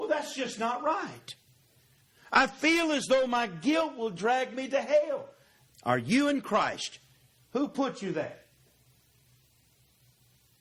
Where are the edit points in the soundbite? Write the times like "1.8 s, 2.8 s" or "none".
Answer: 5.7 s